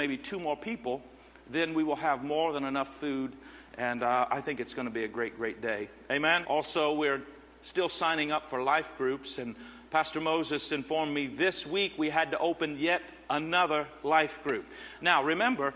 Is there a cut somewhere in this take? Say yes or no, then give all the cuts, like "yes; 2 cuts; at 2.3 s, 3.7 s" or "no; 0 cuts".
yes; 1 cut; at 6.4 s